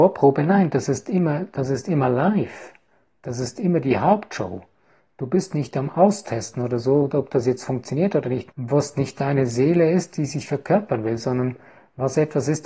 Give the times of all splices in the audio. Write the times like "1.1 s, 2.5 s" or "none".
8.5 s